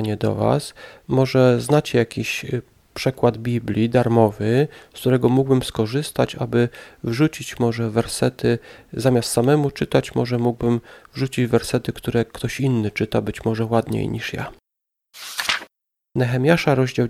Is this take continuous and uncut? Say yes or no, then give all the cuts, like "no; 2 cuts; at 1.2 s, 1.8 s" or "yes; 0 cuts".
yes; 0 cuts